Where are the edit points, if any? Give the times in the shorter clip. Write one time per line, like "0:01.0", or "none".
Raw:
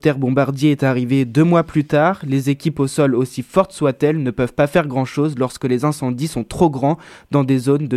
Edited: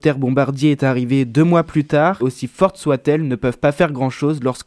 0:02.2